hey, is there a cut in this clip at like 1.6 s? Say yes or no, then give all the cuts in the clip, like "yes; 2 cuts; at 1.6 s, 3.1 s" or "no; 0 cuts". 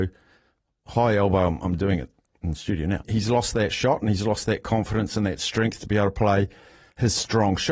no; 1 cut; at 3.0 s